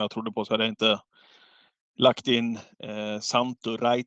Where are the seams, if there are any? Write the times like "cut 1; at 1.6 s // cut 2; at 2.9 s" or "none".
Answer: none